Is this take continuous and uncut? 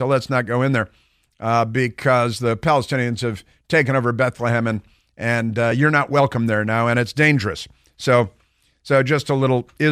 yes; 0 cuts

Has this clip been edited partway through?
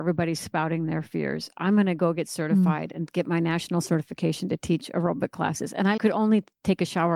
yes; 1 cut; at 6.0 s

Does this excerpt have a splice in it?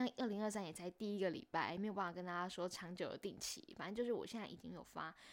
no; 0 cuts

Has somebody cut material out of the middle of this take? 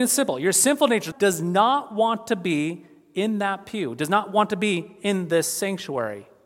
yes; 1 cut; at 1.1 s

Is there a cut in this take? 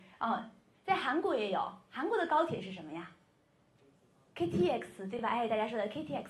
no; 0 cuts

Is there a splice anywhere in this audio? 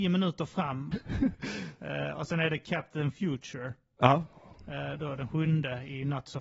yes; 1 cut; at 0.9 s

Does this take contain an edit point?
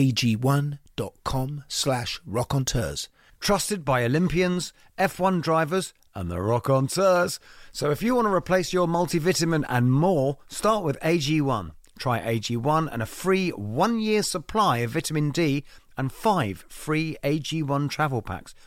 yes; 1 cut; at 3.3 s

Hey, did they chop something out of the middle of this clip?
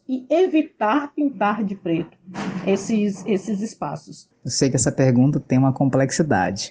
yes; 1 cut; at 4.3 s

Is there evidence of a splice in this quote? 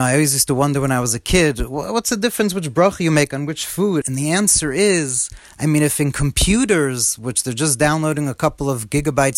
yes; 1 cut; at 4.0 s

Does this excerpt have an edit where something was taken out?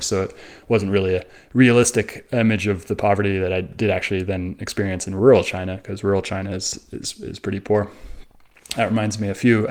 no; 0 cuts

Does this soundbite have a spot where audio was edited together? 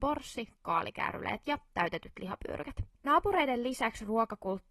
yes; 1 cut; at 2.9 s

